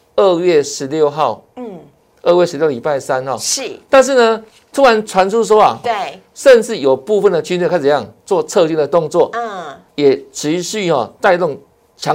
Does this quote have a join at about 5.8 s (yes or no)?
yes